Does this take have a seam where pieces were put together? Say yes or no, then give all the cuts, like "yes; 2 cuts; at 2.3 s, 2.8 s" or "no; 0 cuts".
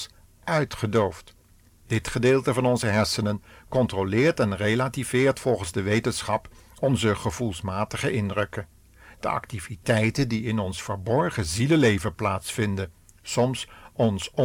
yes; 1 cut; at 1.7 s